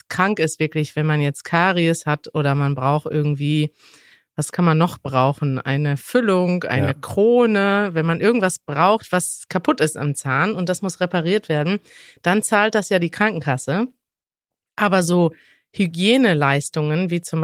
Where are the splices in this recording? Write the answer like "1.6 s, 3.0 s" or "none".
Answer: none